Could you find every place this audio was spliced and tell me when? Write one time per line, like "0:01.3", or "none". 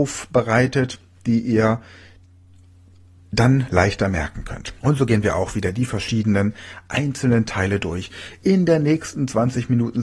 0:04.8